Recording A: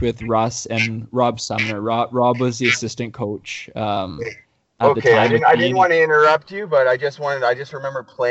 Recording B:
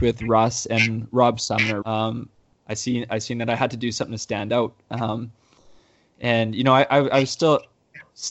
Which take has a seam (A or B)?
B